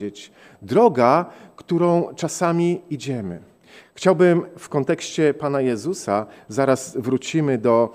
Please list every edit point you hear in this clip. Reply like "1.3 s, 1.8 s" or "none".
none